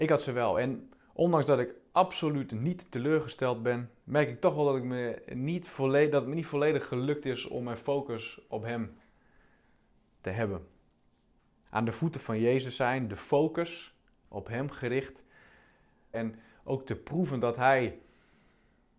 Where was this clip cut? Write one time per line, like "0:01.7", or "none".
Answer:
0:11.7
0:16.1